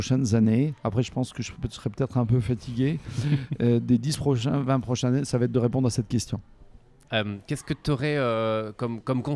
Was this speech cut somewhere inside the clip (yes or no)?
yes